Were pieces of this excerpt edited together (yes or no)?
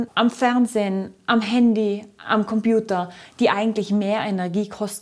no